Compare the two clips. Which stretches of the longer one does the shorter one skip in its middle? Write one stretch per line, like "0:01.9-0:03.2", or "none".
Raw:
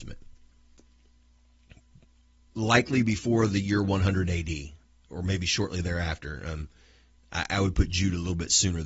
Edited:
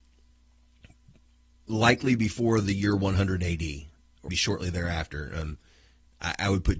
0:05.2-0:05.4